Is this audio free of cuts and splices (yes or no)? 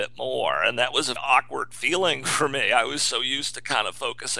no